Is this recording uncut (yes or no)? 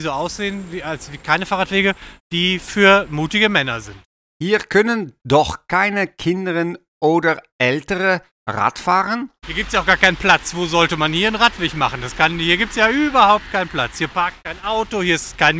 yes